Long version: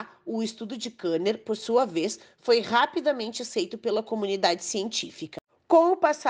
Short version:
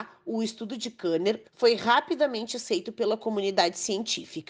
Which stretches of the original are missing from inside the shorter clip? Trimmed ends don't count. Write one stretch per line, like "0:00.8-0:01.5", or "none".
0:01.4-0:02.3